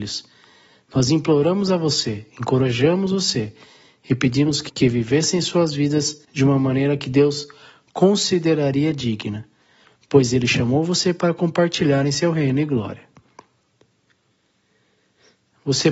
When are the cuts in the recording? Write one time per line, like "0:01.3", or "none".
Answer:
0:04.7
0:06.2